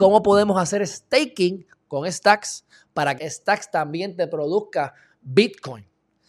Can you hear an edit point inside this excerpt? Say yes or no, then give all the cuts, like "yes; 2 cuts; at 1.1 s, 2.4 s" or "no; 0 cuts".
yes; 1 cut; at 3.2 s